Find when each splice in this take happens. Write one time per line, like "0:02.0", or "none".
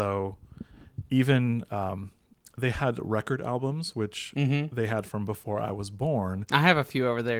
none